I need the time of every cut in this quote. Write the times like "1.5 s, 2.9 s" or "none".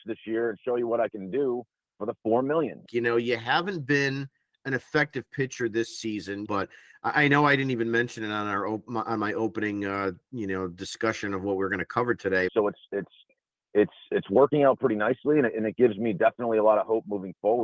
2.9 s, 6.5 s, 12.5 s